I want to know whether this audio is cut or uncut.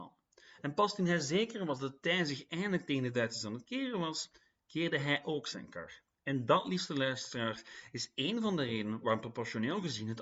uncut